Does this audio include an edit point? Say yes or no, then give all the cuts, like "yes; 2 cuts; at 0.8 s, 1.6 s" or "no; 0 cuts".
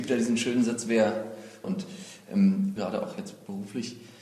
yes; 2 cuts; at 1.6 s, 2.8 s